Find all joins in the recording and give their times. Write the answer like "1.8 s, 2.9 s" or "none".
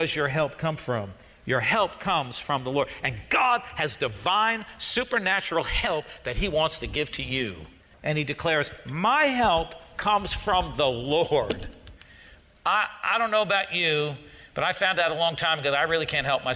7.9 s